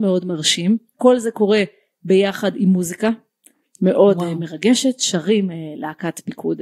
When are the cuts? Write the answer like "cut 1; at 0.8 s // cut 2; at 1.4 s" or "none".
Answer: none